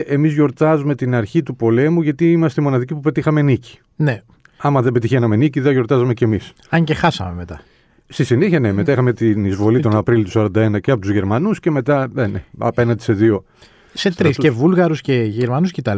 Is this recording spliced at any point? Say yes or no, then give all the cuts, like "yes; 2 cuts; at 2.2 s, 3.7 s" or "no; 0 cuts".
no; 0 cuts